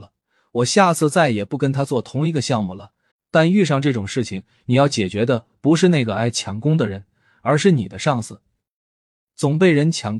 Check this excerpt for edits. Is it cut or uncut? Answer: cut